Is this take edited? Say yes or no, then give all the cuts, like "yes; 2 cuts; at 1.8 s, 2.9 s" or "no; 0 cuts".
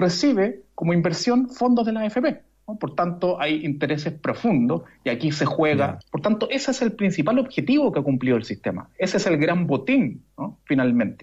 yes; 1 cut; at 6.0 s